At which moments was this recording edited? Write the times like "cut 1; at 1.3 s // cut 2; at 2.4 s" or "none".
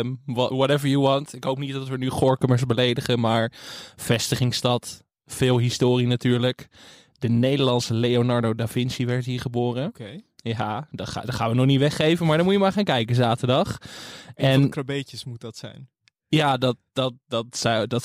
none

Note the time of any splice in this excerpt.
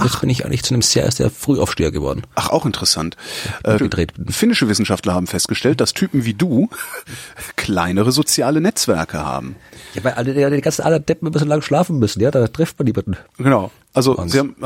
cut 1; at 3.8 s

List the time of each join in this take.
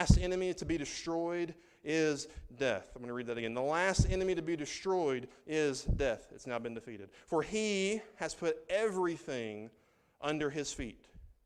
none

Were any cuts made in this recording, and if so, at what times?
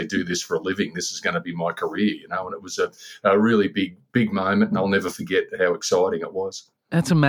none

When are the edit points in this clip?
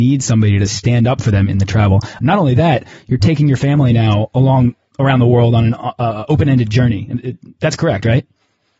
cut 1; at 2.2 s

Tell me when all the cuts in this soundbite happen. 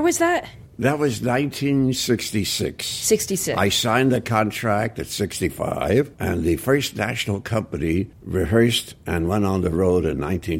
cut 1; at 6.1 s // cut 2; at 8.1 s

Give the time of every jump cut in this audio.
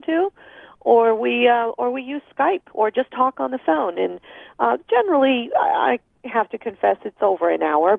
none

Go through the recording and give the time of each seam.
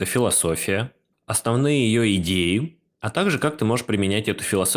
none

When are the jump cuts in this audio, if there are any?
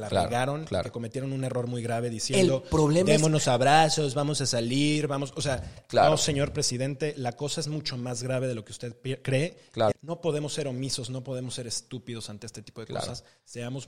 cut 1; at 9.9 s

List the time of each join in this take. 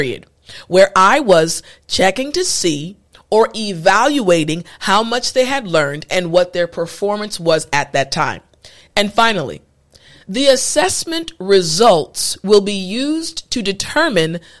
cut 1; at 8.9 s

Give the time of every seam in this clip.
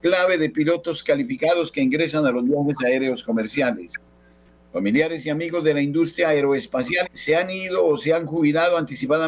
cut 1; at 4.6 s // cut 2; at 7.0 s

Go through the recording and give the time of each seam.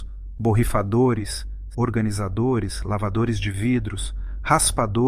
cut 1; at 1.7 s

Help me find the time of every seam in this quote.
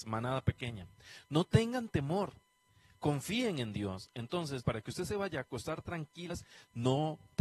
cut 1; at 4.6 s // cut 2; at 6.3 s

